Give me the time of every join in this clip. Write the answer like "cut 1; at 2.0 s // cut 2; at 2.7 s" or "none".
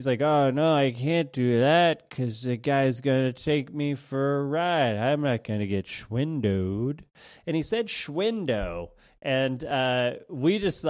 none